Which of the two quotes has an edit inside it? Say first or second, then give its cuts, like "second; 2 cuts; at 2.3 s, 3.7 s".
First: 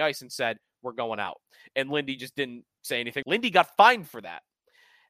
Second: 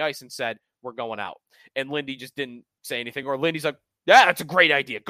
first; 1 cut; at 3.2 s